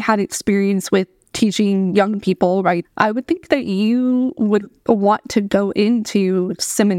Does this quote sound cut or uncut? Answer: cut